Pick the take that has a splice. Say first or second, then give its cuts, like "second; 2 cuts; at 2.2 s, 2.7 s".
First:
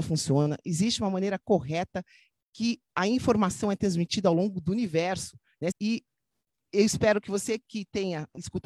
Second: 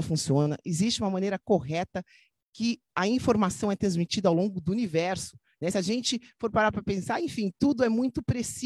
first; 1 cut; at 5.7 s